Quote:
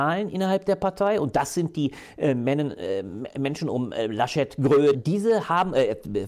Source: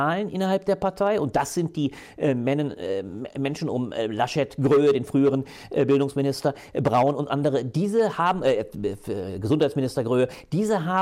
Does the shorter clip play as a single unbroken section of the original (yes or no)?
no